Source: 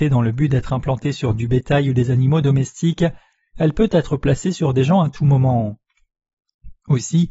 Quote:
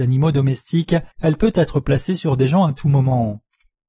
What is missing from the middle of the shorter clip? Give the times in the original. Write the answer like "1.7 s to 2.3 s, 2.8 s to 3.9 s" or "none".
3.2 s to 3.5 s